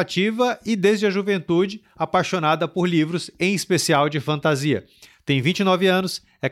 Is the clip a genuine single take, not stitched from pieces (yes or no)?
yes